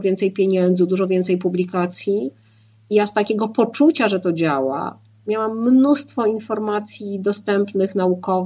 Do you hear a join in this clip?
no; 0 cuts

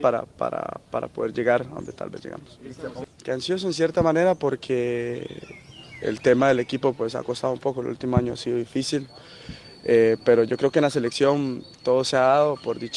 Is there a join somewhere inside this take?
no; 0 cuts

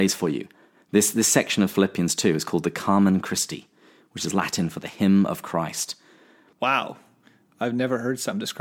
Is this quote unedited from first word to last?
yes; 0 cuts

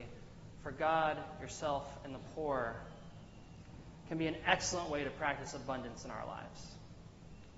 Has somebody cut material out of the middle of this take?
no; 0 cuts

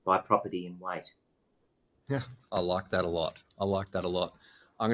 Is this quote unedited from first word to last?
yes; 0 cuts

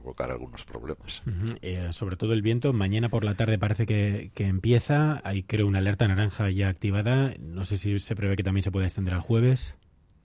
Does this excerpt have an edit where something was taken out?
no; 0 cuts

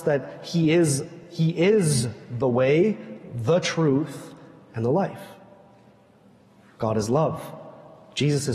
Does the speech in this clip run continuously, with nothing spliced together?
yes; 0 cuts

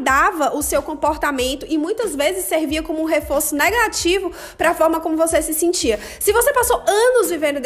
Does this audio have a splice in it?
no; 0 cuts

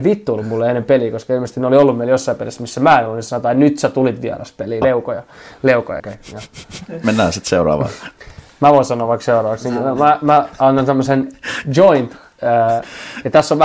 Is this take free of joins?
no; 2 cuts; at 4.8 s, 6.0 s

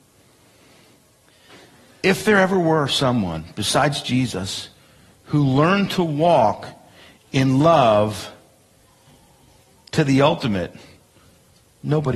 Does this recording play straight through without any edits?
yes; 0 cuts

